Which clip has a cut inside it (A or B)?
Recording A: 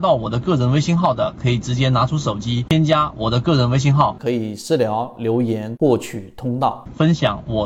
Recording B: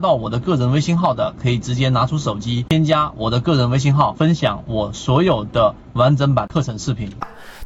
B